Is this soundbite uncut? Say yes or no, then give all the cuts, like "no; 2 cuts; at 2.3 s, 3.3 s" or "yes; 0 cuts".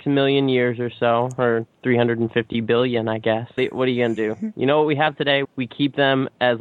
no; 2 cuts; at 3.6 s, 5.4 s